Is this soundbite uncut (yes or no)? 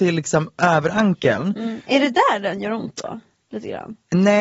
yes